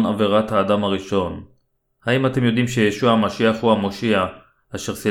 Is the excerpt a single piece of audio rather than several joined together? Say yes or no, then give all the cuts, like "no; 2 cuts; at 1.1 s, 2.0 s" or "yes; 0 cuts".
no; 1 cut; at 1.8 s